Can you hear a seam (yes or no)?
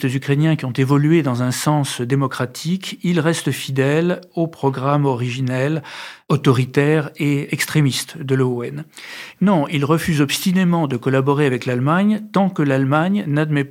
yes